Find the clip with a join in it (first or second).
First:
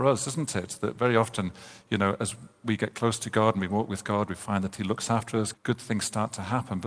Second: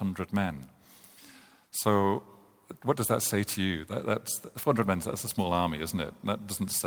first